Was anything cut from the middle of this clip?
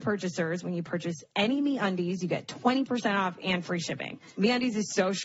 no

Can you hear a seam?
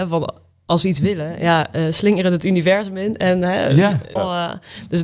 yes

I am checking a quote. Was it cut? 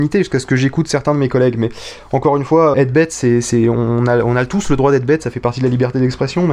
yes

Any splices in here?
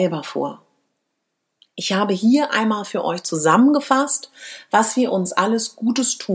no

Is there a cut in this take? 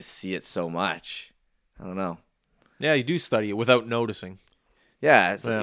no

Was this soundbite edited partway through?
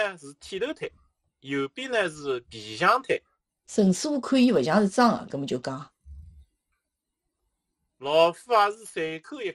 yes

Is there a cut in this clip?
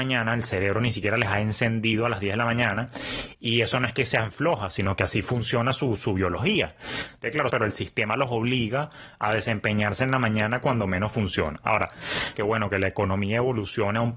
yes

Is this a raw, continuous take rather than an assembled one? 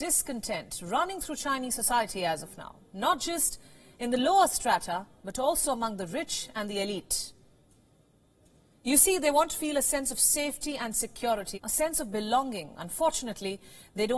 no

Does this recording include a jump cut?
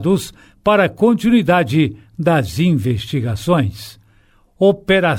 no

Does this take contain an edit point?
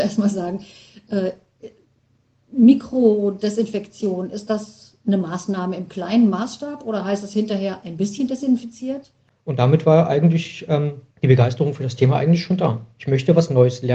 yes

